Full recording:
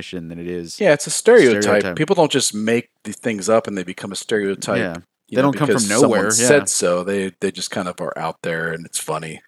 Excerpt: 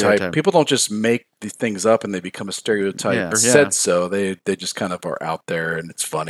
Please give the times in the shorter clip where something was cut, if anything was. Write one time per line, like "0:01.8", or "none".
0:03.3